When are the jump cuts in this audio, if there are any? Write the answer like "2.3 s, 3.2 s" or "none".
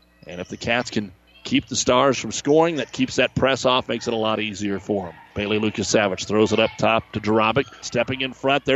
7.8 s